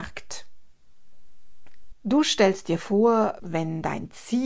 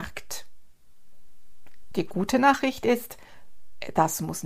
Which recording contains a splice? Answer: first; 2 cuts; at 1.9 s, 3.4 s

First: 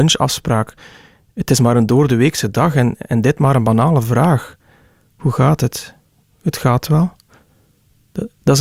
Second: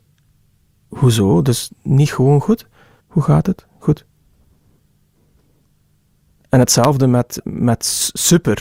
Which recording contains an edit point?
second; 1 cut; at 3.0 s

